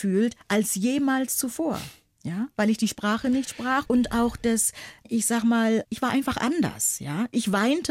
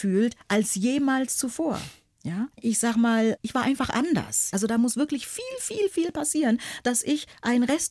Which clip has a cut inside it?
second; 2 cuts; at 2.5 s, 4.5 s

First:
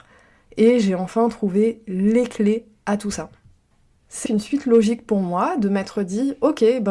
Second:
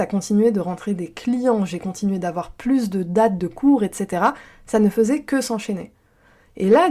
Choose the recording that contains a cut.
first; 1 cut; at 4.3 s

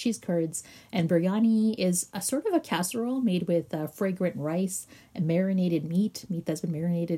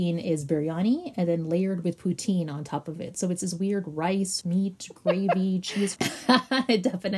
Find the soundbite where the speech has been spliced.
second; 2 cuts; at 4.4 s, 6.0 s

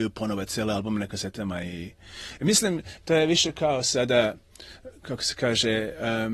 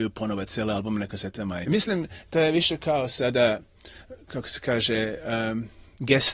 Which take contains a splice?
second; 1 cut; at 1.6 s

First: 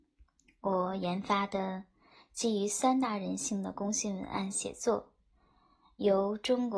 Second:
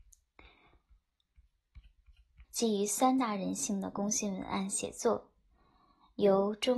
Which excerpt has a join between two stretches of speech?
second; 1 cut; at 2.4 s

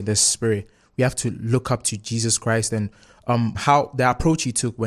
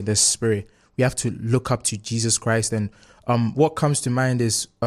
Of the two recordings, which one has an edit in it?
first; 1 cut; at 3.5 s

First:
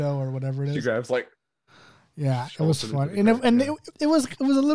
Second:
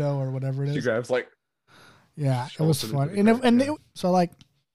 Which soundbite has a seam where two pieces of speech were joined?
second; 1 cut; at 3.8 s

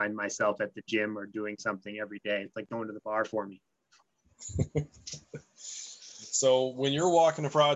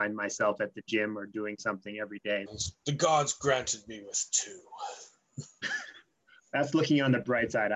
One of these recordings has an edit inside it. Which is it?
second; 1 cut; at 2.5 s

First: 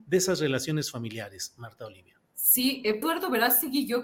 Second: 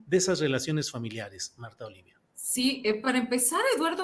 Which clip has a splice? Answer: first; 1 cut; at 3.0 s

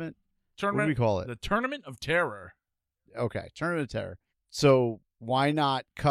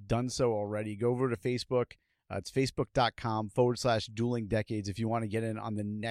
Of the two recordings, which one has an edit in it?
first; 1 cut; at 4.3 s

